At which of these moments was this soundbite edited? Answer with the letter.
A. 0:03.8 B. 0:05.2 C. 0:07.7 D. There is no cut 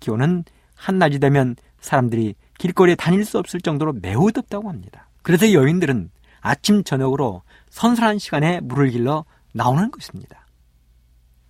B